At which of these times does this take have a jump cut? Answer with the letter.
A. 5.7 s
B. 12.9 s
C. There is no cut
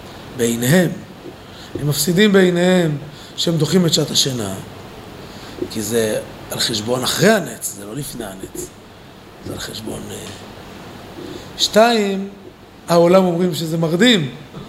B